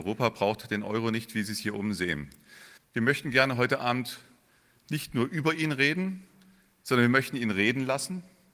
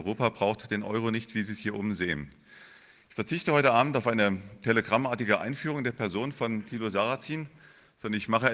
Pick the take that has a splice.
first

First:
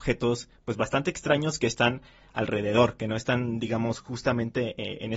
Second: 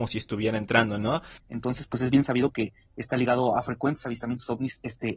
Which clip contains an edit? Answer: second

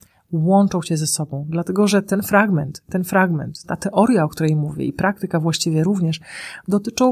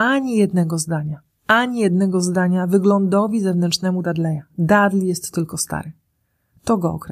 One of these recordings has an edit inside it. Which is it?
first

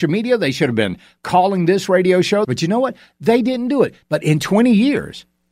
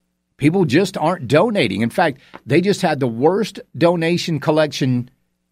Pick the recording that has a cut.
first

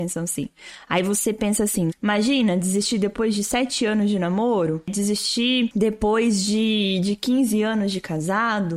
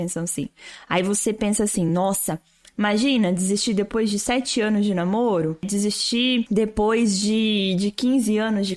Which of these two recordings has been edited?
first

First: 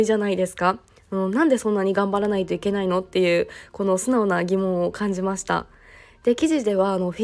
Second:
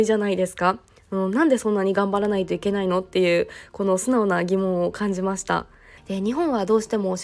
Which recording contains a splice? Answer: second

